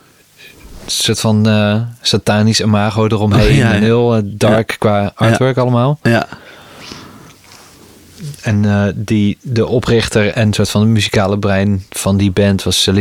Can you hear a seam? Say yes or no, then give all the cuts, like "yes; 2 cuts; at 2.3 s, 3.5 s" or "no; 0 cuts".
yes; 1 cut; at 10.3 s